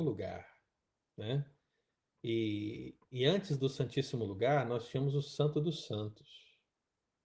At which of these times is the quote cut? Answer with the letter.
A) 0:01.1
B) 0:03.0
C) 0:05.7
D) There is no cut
D